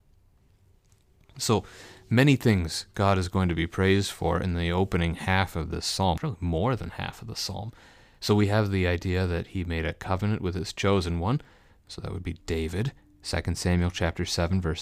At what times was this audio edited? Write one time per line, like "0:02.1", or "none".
0:06.2